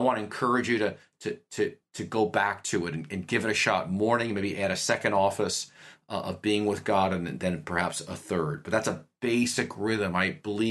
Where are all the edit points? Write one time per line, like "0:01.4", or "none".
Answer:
none

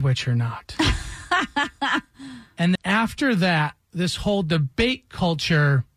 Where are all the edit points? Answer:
0:02.8

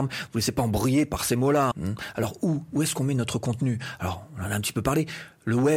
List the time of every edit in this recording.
0:01.7

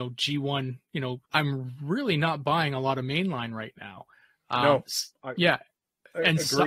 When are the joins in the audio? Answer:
0:01.2

